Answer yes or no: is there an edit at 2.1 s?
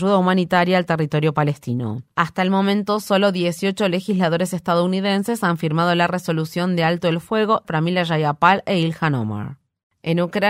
no